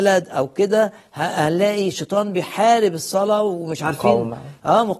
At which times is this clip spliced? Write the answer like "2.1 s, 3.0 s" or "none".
none